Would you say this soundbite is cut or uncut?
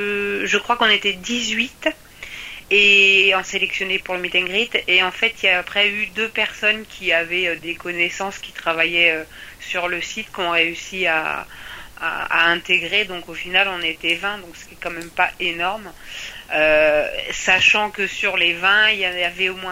uncut